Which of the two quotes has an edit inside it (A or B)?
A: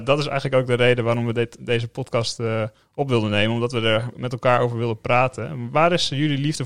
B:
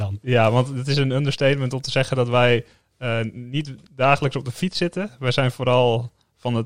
A